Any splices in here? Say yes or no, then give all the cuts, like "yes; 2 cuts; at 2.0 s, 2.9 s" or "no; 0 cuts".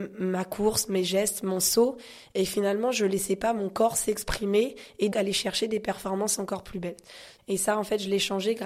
yes; 2 cuts; at 5.1 s, 7.4 s